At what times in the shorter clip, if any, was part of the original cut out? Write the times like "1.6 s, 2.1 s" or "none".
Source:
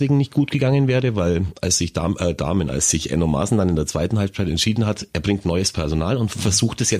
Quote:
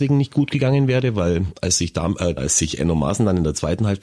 2.4 s